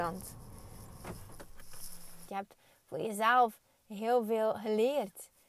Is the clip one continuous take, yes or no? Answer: no